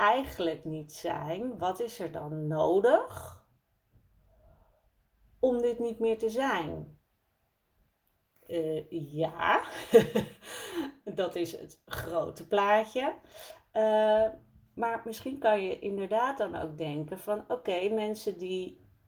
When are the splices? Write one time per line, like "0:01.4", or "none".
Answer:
0:08.3